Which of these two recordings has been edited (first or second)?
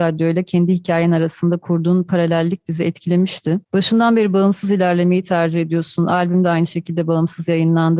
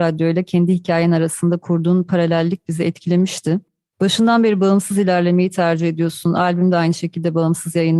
first